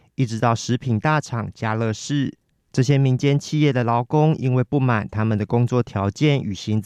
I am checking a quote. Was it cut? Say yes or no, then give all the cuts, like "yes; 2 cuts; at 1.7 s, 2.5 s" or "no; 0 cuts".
no; 0 cuts